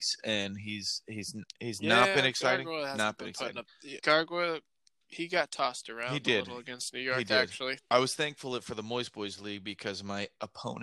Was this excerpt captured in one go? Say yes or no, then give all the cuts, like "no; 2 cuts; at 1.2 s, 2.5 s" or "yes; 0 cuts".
no; 2 cuts; at 4.0 s, 7.8 s